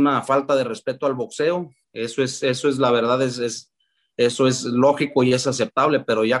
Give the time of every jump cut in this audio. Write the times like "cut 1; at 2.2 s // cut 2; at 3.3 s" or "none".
cut 1; at 1.8 s

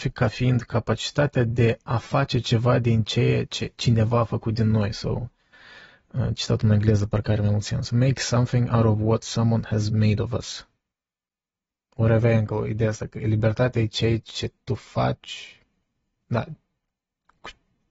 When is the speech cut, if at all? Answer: none

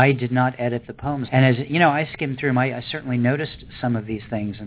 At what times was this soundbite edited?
cut 1; at 1.3 s

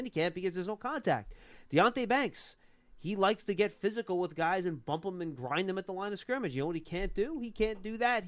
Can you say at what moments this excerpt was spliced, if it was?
none

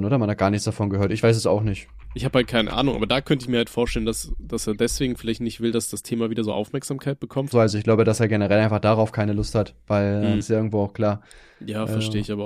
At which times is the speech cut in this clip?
cut 1; at 7.5 s // cut 2; at 10.4 s

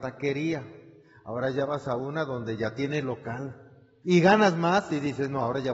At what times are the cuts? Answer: cut 1; at 4.0 s

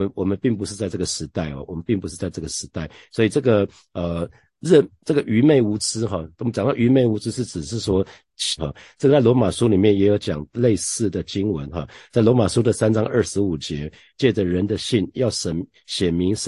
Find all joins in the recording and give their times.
cut 1; at 8.6 s // cut 2; at 14.1 s

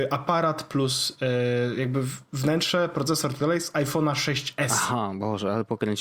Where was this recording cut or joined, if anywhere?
none

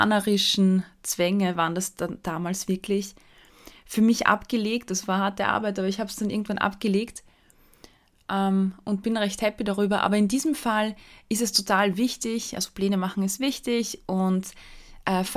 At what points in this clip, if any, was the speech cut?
none

